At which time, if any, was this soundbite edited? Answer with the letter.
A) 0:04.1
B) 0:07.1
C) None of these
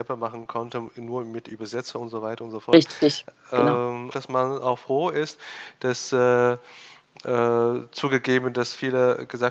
A